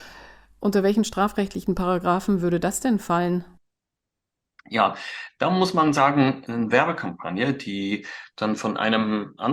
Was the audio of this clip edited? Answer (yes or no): yes